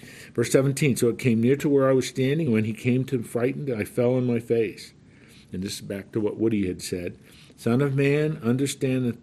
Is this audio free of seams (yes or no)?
yes